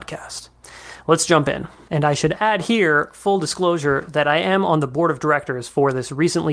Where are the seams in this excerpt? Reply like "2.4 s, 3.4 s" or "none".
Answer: 1.9 s